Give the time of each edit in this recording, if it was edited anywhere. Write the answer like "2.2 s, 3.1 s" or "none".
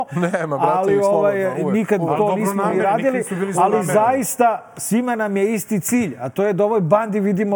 none